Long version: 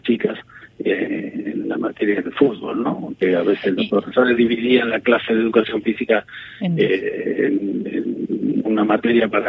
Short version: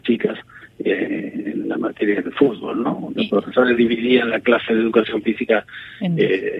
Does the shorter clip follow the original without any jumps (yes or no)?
no